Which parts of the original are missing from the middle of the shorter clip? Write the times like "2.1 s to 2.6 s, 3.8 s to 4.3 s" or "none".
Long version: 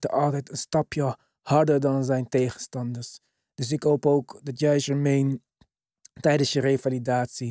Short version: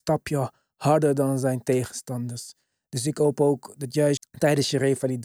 4.8 s to 6.0 s